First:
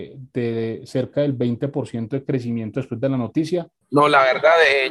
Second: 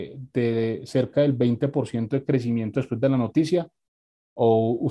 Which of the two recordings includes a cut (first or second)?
first